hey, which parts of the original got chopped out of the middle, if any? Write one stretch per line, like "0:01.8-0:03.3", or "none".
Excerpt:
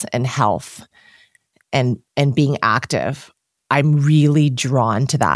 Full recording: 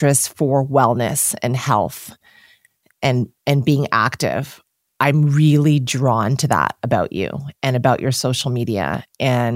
none